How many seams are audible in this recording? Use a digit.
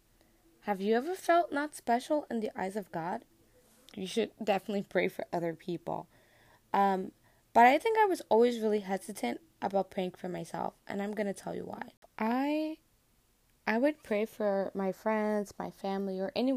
2